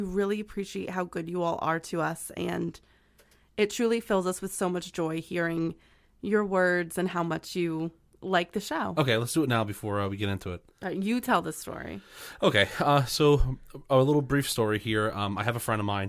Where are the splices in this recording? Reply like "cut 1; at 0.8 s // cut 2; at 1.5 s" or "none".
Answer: cut 1; at 8.9 s